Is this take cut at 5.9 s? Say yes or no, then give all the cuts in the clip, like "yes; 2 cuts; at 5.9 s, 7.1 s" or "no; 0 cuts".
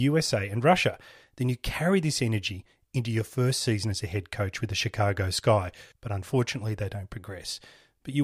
yes; 1 cut; at 5.9 s